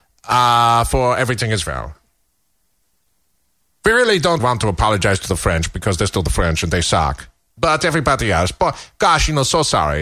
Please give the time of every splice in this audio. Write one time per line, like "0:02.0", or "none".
0:04.4